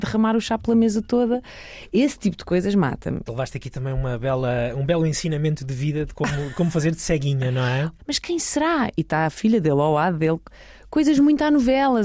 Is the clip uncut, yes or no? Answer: no